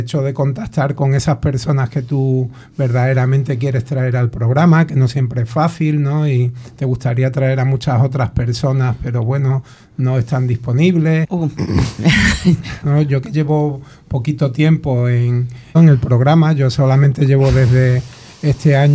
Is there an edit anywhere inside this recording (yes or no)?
yes